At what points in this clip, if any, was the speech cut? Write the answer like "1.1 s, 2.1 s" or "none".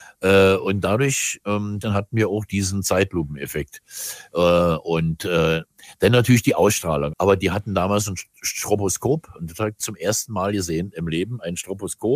1.8 s, 7.1 s, 9.8 s